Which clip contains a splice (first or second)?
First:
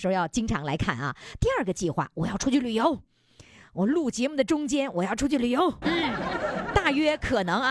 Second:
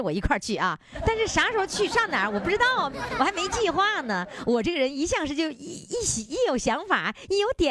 first